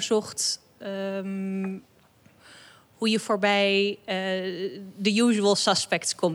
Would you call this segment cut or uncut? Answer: uncut